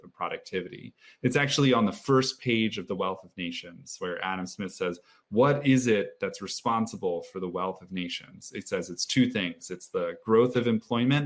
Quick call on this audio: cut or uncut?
uncut